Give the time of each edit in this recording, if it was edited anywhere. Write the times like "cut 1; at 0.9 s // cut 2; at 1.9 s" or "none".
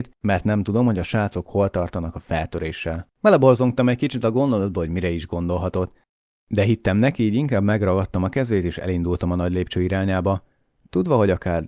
cut 1; at 3.1 s